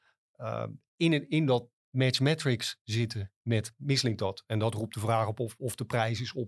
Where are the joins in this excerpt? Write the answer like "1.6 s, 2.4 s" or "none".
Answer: none